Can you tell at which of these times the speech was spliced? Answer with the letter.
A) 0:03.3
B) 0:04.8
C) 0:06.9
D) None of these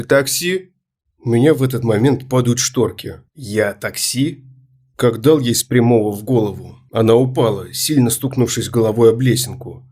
A